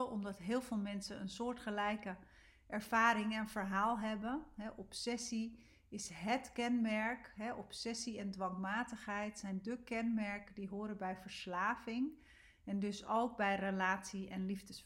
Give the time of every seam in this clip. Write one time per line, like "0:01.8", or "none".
none